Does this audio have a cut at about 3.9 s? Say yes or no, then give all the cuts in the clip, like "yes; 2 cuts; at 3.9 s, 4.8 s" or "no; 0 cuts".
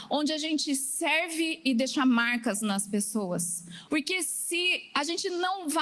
yes; 1 cut; at 3.9 s